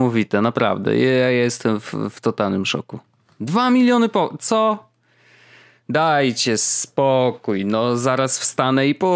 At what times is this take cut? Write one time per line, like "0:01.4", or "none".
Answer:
none